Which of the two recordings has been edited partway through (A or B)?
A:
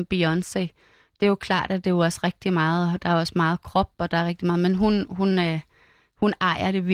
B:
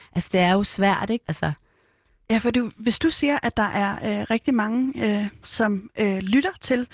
B